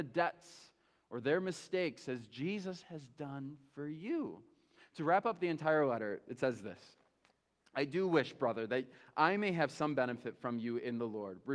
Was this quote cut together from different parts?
no; 0 cuts

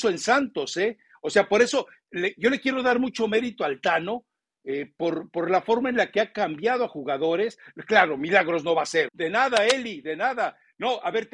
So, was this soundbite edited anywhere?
yes; 1 cut; at 9.1 s

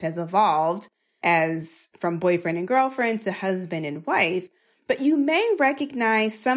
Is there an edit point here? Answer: no; 0 cuts

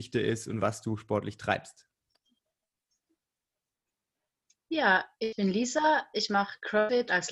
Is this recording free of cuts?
yes; 0 cuts

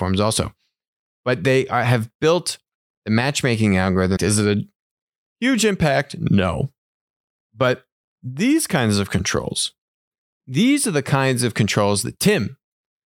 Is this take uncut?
no; 1 cut; at 4.2 s

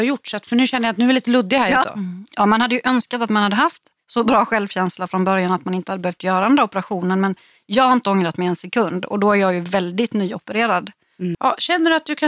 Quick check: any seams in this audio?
yes; 2 cuts; at 1.8 s, 11.3 s

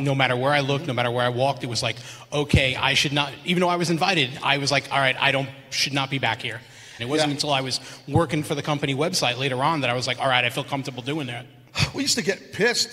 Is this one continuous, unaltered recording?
no; 1 cut; at 7.0 s

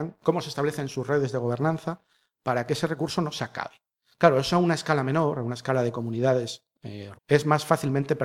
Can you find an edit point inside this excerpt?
yes; 1 cut; at 7.1 s

